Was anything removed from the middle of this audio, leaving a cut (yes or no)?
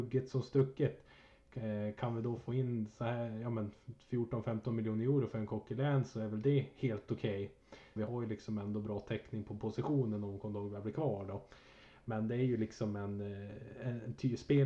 yes